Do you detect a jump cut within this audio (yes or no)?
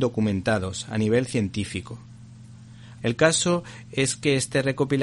yes